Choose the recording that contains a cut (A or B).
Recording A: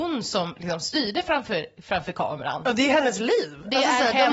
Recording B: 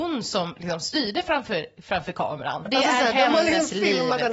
B